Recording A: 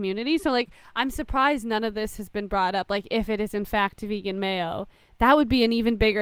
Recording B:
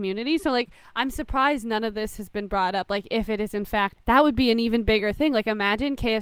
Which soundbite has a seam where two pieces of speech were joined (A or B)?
B